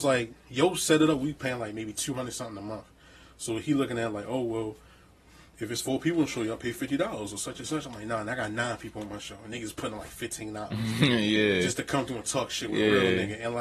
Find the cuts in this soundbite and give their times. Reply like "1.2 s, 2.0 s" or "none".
none